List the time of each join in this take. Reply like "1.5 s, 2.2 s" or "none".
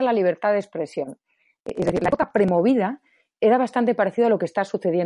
1.6 s